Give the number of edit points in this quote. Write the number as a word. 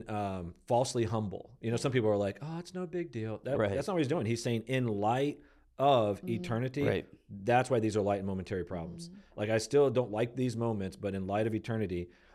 zero